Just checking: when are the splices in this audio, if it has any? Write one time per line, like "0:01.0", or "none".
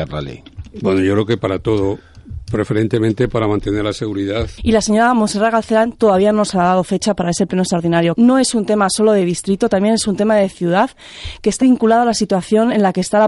0:04.6
0:08.1
0:11.6